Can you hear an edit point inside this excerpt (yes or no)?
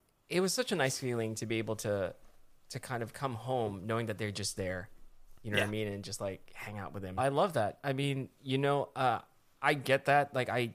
yes